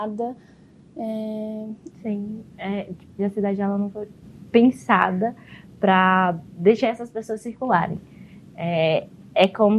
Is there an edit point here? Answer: yes; 2 cuts; at 1.9 s, 3.2 s

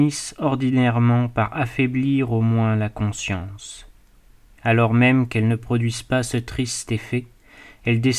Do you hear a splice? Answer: no; 0 cuts

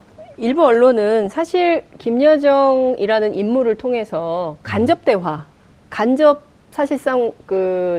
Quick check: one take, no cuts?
yes; 0 cuts

